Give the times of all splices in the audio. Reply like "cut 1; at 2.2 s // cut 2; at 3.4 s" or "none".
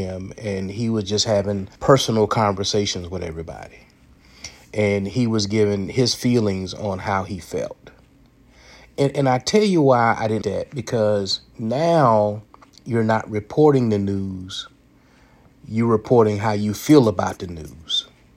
cut 1; at 1.8 s // cut 2; at 10.4 s